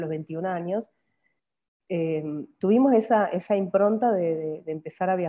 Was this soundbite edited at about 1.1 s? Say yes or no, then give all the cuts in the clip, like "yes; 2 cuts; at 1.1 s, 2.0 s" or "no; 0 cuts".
no; 0 cuts